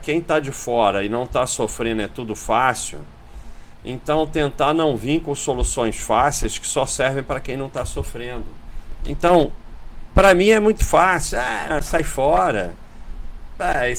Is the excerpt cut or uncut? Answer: cut